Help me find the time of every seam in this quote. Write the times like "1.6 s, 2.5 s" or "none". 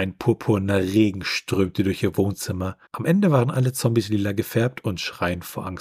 2.9 s